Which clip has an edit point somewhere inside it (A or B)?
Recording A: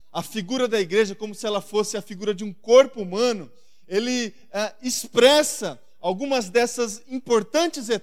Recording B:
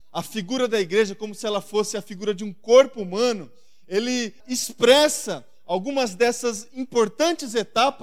B